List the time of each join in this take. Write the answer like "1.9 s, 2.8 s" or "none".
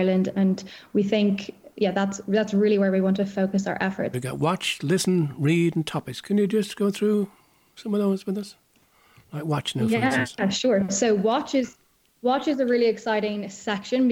4.1 s